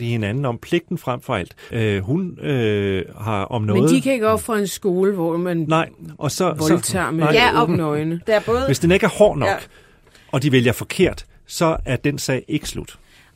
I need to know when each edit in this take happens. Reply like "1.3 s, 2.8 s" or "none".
1.7 s, 8.2 s